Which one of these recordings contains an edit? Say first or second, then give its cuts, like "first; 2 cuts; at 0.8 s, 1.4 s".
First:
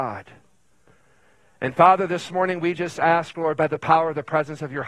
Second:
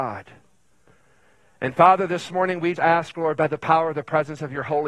second; 1 cut; at 2.8 s